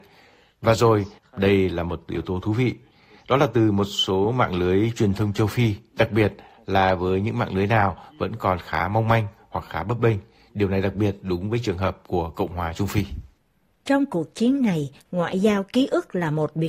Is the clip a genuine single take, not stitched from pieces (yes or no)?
no